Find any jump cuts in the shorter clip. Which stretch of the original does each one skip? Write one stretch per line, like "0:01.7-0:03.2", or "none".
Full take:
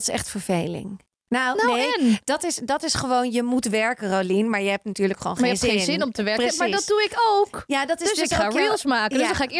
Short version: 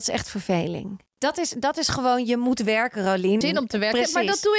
0:01.2-0:02.2
0:04.5-0:05.9